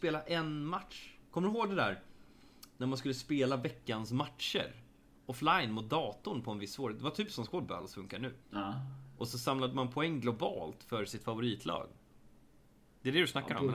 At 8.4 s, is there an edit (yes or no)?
yes